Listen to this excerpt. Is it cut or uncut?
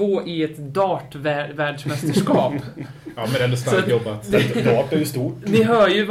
uncut